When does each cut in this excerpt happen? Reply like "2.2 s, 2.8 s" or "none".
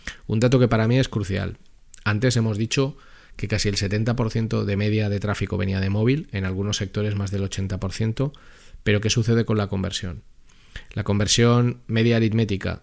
none